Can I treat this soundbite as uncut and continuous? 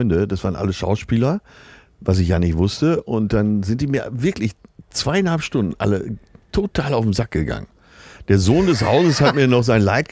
yes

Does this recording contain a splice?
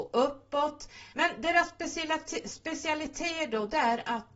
yes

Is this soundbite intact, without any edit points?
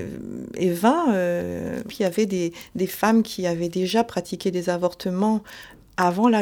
yes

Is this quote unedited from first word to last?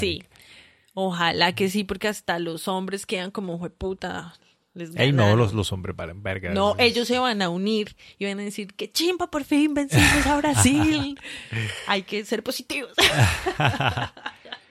yes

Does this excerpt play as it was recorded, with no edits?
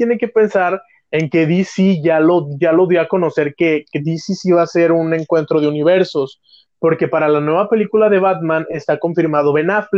yes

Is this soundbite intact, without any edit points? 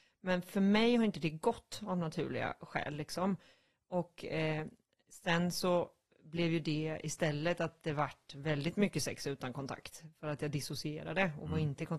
yes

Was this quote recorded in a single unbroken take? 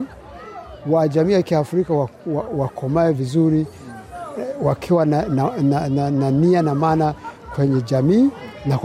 yes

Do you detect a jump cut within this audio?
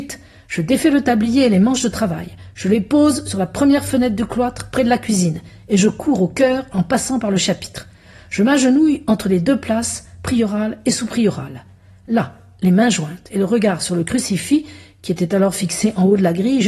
no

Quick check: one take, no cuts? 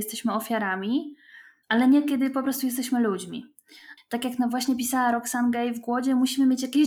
no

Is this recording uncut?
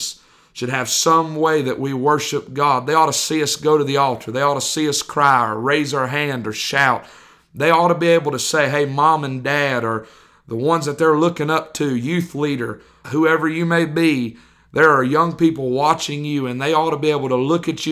no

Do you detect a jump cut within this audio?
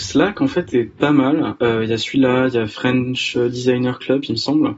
no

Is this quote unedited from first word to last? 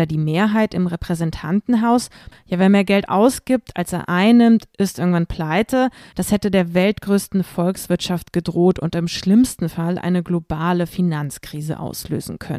no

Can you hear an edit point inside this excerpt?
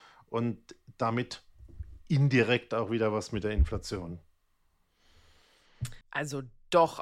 yes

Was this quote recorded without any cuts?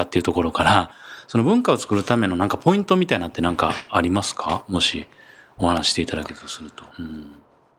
no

